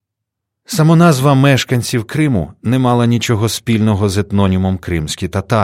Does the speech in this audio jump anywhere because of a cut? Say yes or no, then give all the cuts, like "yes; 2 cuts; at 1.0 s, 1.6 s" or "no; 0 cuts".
no; 0 cuts